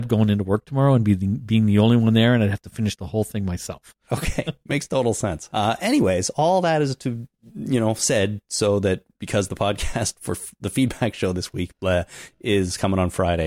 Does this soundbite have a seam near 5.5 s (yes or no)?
yes